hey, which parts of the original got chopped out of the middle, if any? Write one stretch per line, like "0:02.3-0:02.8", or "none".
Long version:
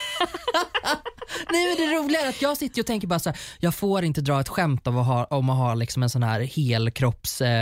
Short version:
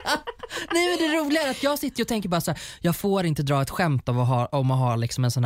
none